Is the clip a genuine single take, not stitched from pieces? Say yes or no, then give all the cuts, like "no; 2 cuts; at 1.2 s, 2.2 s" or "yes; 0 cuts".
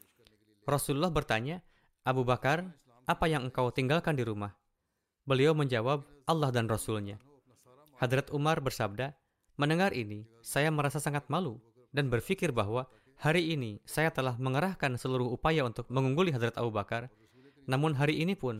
yes; 0 cuts